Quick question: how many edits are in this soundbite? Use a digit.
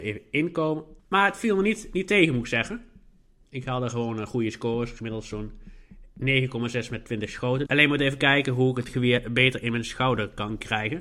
2